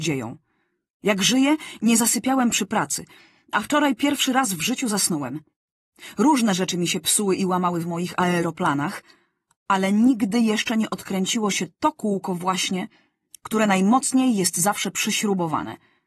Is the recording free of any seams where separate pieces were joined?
yes; 0 cuts

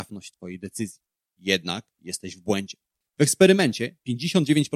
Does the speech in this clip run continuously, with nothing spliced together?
yes; 0 cuts

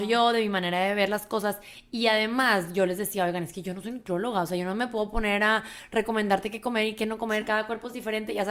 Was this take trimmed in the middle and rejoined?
no; 0 cuts

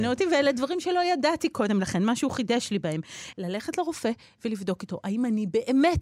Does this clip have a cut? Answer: yes; 1 cut; at 3.3 s

